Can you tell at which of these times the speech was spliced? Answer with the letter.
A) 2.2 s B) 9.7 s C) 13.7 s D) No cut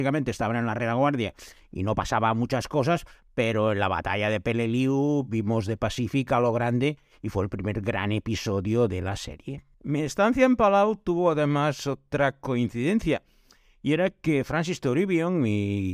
B